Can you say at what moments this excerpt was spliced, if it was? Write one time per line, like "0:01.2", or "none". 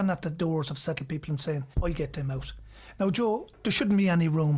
0:01.7